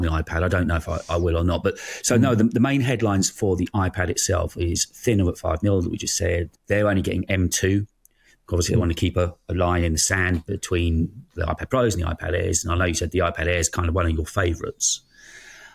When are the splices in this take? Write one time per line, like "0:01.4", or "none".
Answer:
0:06.5